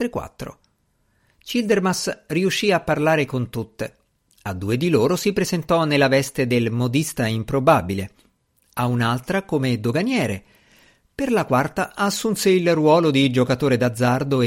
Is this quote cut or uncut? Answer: uncut